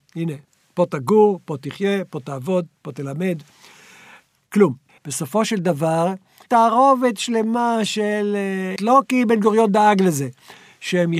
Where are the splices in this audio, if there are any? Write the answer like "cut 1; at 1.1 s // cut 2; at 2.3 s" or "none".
cut 1; at 5.0 s // cut 2; at 6.5 s // cut 3; at 8.8 s